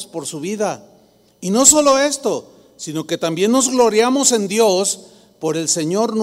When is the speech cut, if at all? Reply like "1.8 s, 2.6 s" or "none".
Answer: none